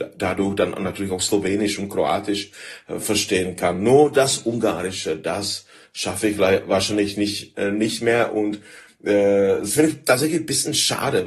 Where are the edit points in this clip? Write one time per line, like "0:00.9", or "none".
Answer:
none